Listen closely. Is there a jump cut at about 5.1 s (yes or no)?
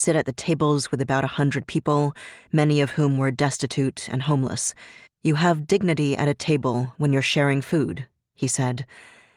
yes